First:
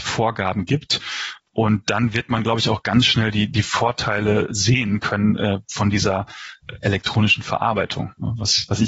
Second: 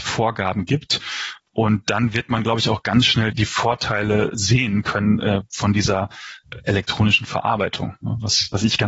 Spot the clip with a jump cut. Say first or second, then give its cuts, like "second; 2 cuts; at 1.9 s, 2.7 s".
second; 1 cut; at 3.3 s